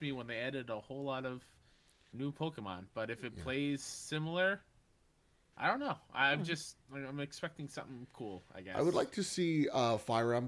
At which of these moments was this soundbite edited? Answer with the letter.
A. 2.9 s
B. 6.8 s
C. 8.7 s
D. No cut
B